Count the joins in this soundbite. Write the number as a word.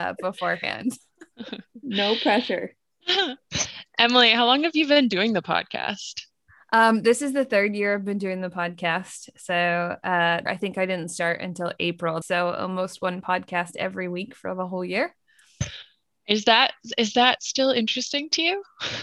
two